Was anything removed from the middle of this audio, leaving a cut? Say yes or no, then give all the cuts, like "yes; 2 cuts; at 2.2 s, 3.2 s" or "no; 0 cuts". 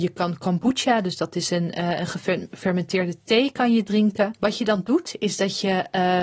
yes; 1 cut; at 4.3 s